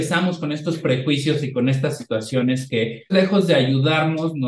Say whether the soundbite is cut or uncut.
cut